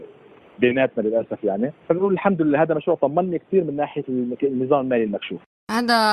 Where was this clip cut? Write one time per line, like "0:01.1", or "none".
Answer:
0:01.8